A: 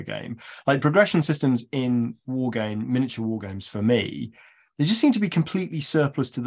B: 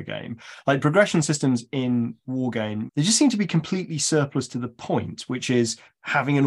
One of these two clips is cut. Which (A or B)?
B